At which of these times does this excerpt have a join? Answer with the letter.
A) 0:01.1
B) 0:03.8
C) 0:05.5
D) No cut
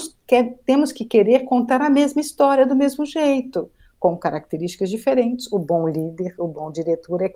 D